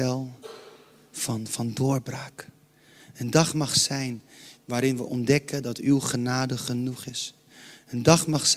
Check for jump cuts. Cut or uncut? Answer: uncut